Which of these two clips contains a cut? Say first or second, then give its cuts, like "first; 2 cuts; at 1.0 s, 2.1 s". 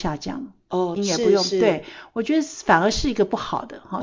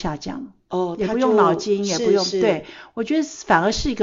first; 1 cut; at 1.0 s